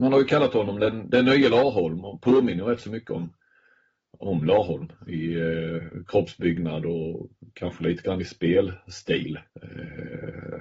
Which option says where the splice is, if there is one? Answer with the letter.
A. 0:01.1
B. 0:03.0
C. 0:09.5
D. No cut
C